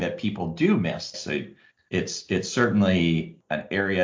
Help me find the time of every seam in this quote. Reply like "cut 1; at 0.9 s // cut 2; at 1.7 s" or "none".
cut 1; at 1.1 s